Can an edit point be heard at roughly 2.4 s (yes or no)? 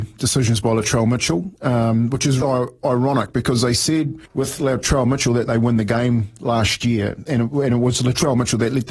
yes